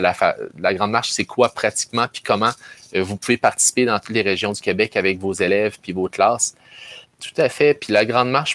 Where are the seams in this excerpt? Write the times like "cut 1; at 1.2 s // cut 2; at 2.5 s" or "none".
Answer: cut 1; at 7.0 s